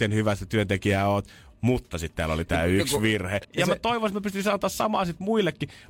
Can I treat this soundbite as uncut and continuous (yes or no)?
no